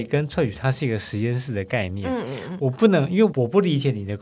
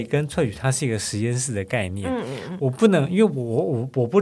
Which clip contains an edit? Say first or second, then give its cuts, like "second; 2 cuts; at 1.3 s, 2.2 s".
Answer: first; 1 cut; at 3.3 s